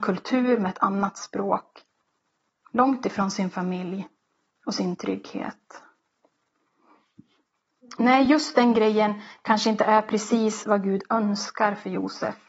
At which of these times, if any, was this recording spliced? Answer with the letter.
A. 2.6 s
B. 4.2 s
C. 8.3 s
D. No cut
D